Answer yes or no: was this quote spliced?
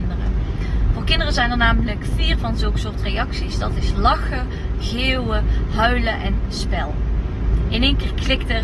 no